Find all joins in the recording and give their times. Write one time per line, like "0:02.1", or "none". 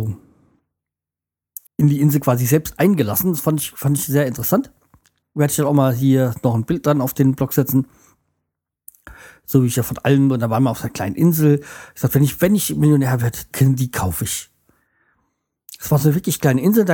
0:01.7
0:13.5